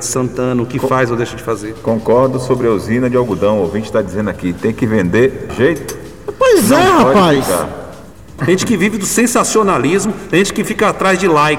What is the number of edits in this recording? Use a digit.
2